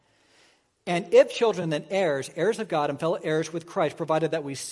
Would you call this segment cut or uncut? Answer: uncut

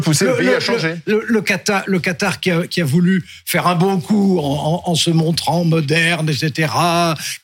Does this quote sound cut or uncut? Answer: uncut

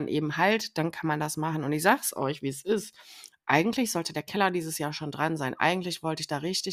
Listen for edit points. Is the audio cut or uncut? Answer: uncut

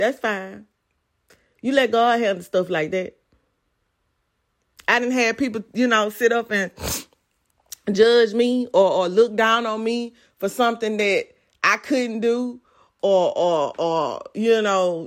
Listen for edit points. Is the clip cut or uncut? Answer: uncut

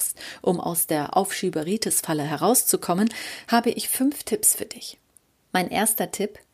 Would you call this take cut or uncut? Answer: uncut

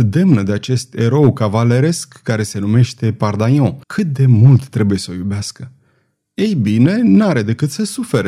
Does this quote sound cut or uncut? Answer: cut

